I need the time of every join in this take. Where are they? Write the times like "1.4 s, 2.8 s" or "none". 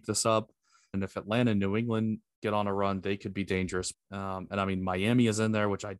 0.9 s, 3.9 s